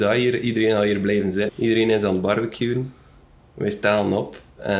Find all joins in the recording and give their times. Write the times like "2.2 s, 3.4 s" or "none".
1.5 s